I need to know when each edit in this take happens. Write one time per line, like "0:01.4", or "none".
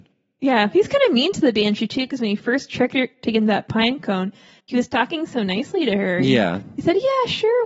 none